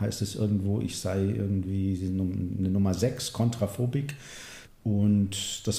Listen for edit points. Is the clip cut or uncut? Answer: cut